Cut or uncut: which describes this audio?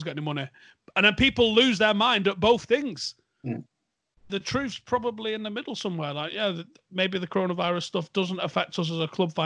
uncut